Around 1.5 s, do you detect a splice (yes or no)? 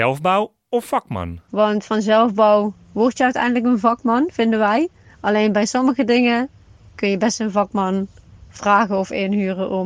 yes